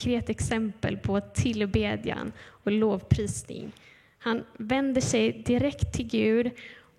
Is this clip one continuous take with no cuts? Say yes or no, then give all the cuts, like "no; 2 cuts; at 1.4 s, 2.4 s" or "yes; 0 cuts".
yes; 0 cuts